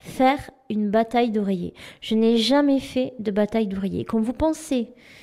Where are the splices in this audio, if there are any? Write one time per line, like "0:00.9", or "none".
none